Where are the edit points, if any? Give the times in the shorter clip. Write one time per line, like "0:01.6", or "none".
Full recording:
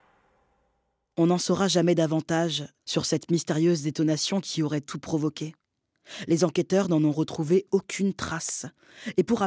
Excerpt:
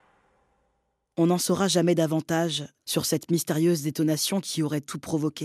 none